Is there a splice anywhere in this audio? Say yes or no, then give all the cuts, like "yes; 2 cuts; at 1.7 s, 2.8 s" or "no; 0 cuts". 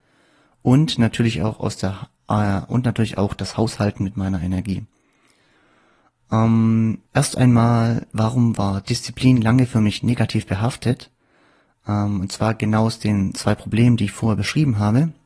yes; 1 cut; at 7.1 s